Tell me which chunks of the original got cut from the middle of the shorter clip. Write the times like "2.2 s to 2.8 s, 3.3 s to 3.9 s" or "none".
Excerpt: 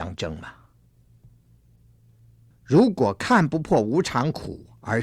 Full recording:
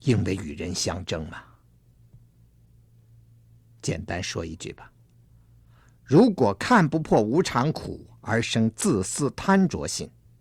3.4 s to 5.9 s